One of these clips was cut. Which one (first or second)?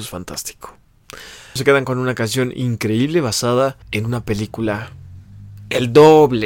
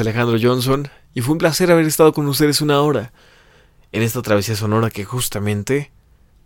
first